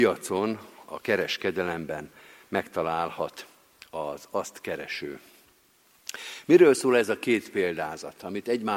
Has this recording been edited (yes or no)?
no